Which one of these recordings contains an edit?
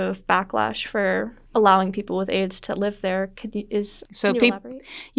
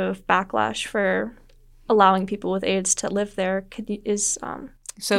first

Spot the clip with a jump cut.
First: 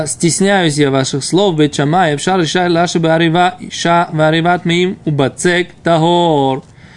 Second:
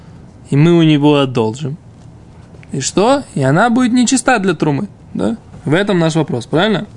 first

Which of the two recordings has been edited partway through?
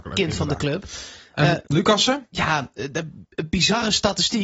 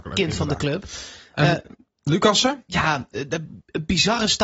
first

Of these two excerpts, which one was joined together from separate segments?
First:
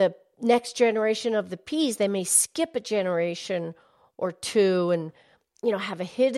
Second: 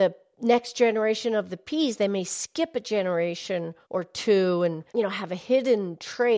second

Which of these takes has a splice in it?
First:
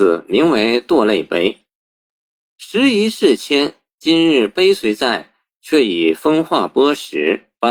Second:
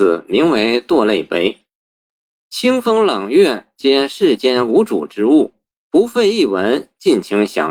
second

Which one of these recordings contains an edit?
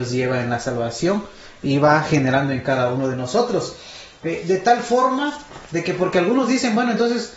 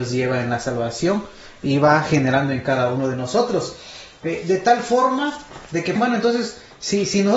second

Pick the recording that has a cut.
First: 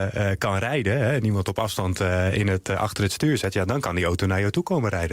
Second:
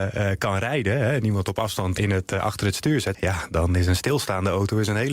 second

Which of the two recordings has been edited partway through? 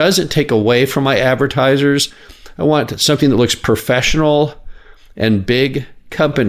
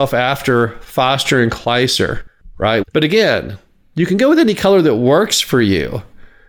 second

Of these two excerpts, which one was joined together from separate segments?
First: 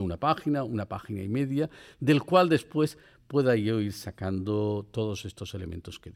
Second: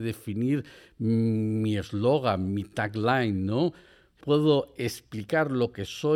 second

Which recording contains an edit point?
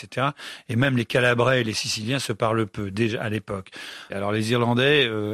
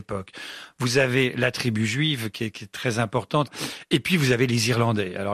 first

